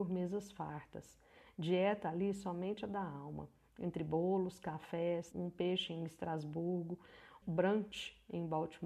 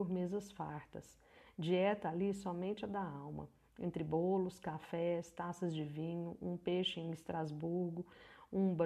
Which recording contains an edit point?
first; 2 cuts; at 5.3 s, 7.4 s

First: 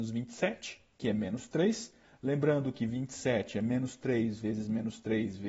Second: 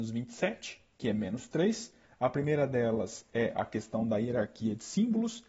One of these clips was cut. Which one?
second; 1 cut; at 2.0 s

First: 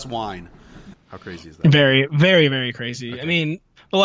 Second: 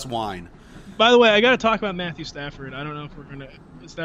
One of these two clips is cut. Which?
first; 1 cut; at 0.9 s

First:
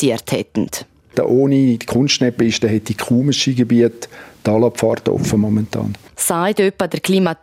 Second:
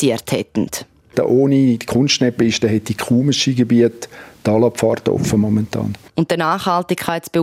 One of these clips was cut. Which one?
second; 1 cut; at 6.1 s

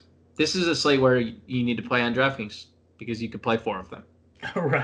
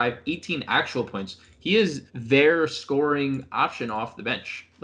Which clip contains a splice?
second; 1 cut; at 2.1 s

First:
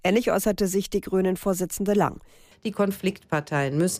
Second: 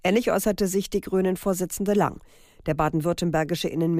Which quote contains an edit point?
first; 1 cut; at 2.5 s

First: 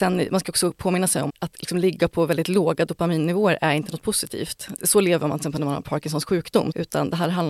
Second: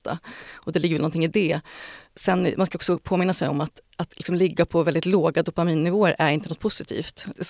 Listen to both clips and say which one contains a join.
first; 1 cut; at 1.3 s

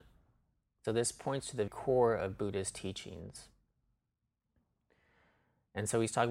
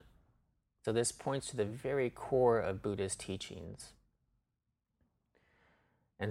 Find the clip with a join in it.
first; 1 cut; at 1.7 s

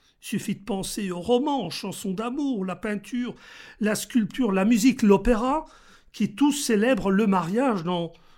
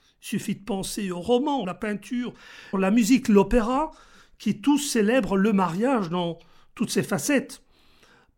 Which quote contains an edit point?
second; 2 cuts; at 1.6 s, 2.7 s

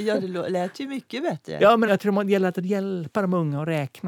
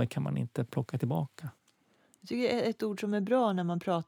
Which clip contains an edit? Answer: first; 1 cut; at 1.9 s

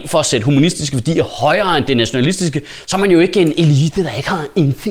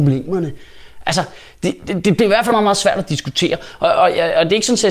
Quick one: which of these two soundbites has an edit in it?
second; 1 cut; at 2.5 s

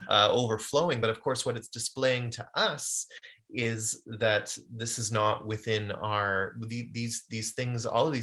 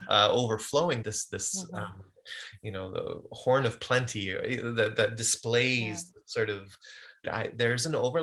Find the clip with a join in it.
second; 2 cuts; at 1.0 s, 7.2 s

